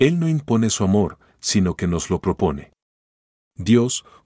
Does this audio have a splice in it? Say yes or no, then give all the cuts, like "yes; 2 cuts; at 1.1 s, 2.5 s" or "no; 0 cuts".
no; 0 cuts